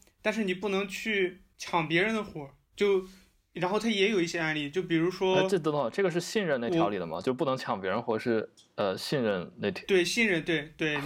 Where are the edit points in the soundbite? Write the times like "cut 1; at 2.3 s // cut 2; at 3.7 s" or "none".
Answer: none